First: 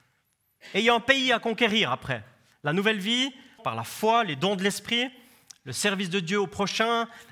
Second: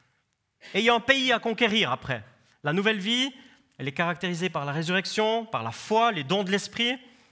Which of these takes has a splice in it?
first; 1 cut; at 3.6 s

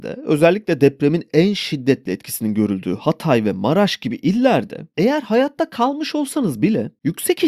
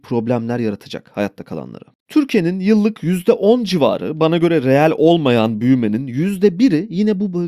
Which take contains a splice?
second; 1 cut; at 2.0 s

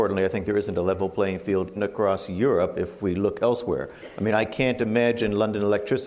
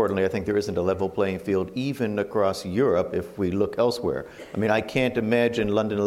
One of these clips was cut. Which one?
first; 1 cut; at 1.8 s

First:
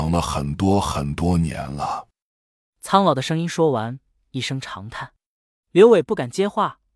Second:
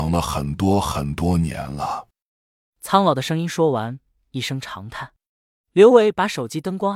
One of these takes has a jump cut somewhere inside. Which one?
second; 1 cut; at 5.3 s

